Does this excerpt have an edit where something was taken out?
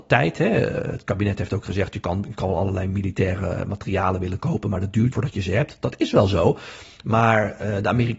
yes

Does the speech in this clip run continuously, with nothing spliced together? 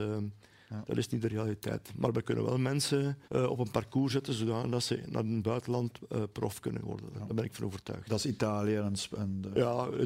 no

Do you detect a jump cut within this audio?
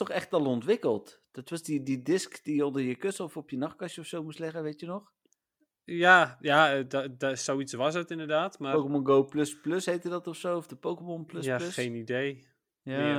no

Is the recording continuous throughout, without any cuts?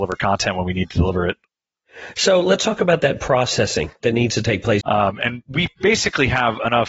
no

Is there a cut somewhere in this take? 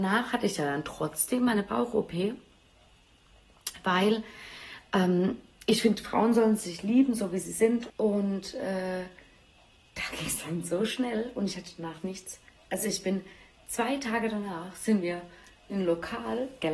yes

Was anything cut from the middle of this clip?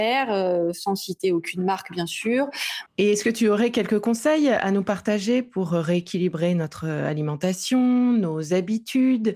yes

